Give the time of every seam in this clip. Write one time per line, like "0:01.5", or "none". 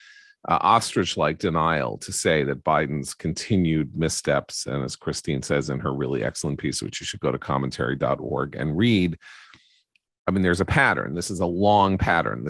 none